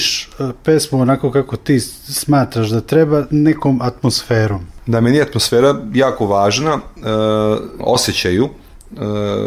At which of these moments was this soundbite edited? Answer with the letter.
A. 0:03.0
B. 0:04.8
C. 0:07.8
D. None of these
C